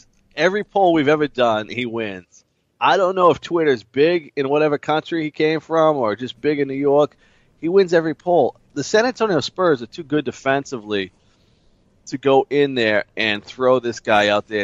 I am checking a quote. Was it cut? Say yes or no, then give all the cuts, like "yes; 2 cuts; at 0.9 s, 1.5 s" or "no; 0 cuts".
no; 0 cuts